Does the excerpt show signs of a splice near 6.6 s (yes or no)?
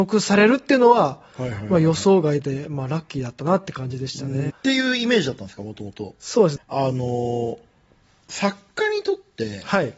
yes